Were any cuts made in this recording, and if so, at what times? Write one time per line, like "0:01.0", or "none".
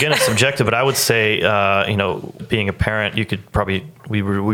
0:02.4